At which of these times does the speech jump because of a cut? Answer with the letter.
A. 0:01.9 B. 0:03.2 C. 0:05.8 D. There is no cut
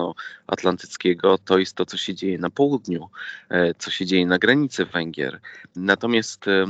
C